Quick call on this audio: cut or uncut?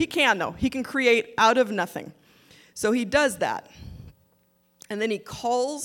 uncut